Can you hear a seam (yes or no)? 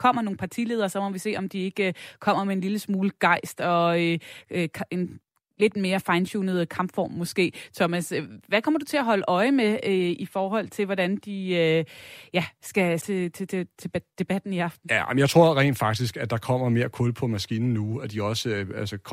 yes